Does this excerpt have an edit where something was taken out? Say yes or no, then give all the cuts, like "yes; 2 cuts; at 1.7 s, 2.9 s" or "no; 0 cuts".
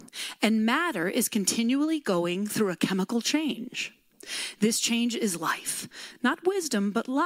no; 0 cuts